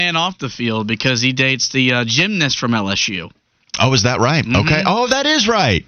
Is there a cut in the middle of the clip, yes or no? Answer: no